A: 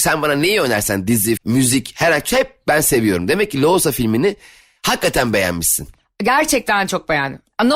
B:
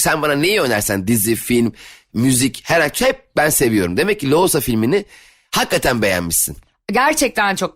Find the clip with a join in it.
A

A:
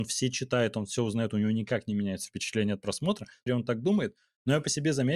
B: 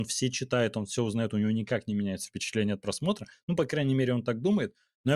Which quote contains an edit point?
A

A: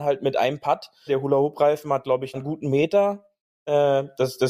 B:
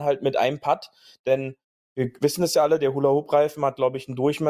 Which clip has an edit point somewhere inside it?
A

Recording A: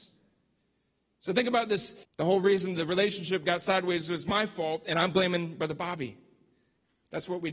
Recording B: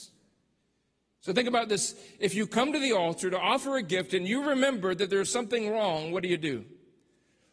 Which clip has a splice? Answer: A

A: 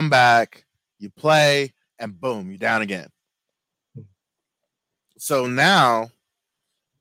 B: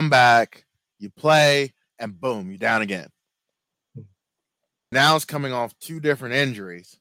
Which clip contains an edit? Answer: B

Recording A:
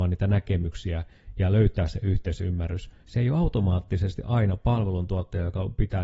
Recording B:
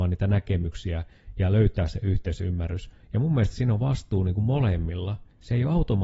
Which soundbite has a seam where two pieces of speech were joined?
A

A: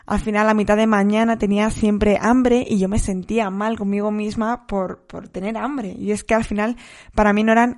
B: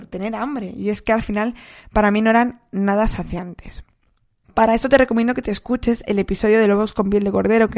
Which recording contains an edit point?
B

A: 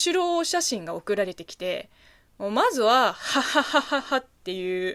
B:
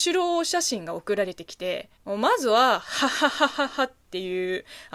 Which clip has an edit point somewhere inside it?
B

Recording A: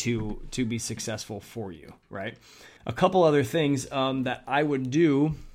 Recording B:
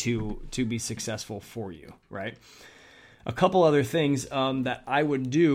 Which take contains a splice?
A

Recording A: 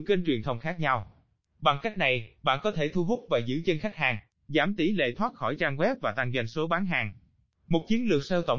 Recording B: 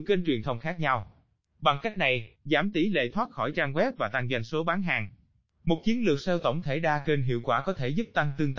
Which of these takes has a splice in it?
B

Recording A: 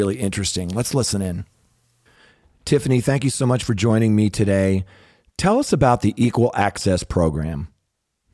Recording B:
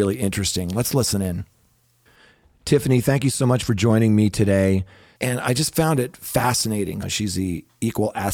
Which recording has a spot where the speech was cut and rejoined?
B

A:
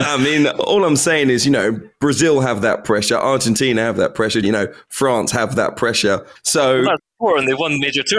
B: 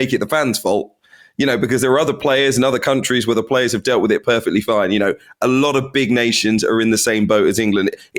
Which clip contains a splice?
A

